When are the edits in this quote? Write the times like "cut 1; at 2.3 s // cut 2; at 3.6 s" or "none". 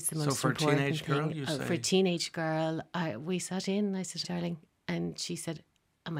cut 1; at 4.2 s